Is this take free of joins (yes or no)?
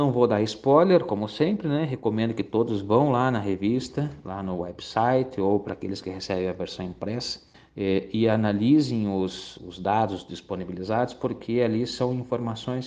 no